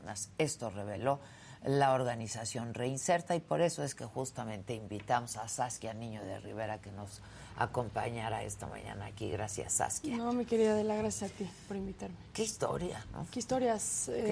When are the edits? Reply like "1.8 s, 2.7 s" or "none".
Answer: none